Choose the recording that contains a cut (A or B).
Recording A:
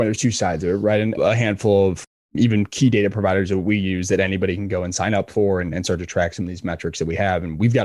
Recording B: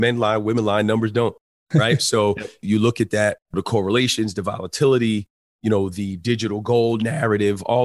A